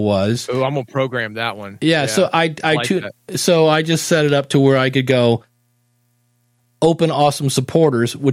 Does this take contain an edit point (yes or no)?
no